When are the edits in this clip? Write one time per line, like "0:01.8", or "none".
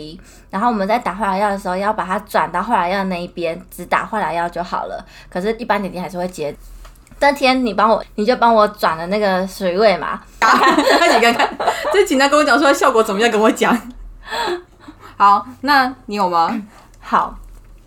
0:08.0
0:10.4